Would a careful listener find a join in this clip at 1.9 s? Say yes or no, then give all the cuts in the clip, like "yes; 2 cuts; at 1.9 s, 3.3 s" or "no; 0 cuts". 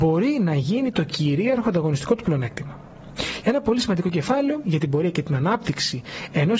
no; 1 cut; at 3.4 s